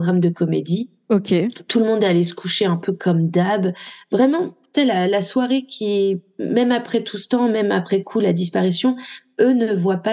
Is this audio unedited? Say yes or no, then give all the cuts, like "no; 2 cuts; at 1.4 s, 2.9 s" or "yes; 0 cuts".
yes; 0 cuts